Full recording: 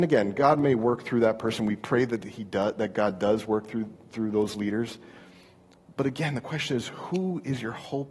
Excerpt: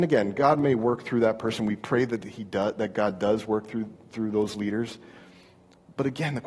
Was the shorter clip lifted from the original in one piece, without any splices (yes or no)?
yes